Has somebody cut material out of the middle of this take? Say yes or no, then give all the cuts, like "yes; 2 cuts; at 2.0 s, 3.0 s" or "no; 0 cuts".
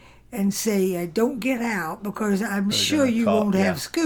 yes; 1 cut; at 2.7 s